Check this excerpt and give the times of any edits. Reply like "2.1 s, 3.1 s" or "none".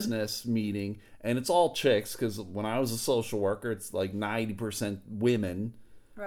none